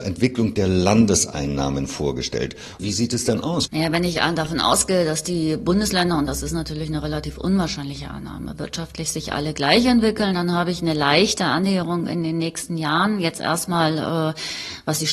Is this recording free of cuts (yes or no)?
no